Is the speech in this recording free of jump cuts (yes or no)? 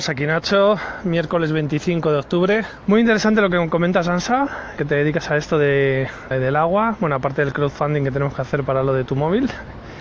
no